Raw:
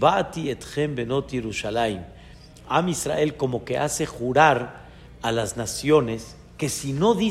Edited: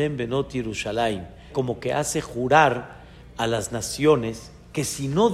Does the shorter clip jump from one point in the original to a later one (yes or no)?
yes